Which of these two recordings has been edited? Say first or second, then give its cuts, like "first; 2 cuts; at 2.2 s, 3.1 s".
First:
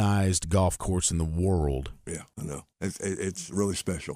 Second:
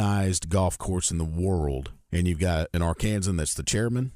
first; 1 cut; at 2.0 s